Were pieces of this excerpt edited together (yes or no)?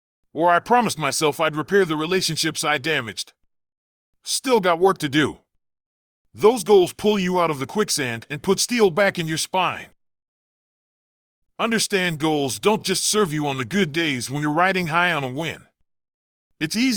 no